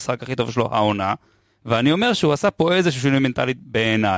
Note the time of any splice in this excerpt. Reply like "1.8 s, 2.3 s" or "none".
none